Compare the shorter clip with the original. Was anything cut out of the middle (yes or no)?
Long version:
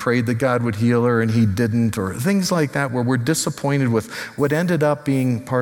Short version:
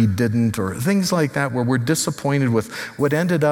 no